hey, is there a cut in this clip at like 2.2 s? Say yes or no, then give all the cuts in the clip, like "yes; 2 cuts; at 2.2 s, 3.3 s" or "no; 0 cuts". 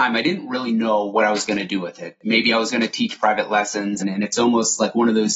no; 1 cut; at 4.0 s